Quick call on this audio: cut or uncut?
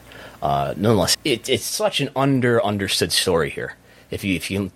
cut